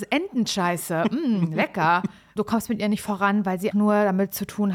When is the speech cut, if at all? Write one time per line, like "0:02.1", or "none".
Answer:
0:02.4
0:03.7